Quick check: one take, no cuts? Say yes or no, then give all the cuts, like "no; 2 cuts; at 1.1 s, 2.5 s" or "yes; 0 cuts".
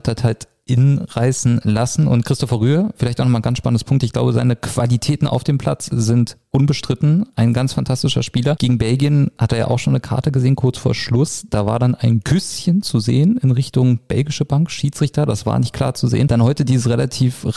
yes; 0 cuts